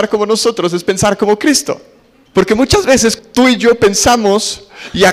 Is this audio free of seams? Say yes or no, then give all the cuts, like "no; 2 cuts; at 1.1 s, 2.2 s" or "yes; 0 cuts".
yes; 0 cuts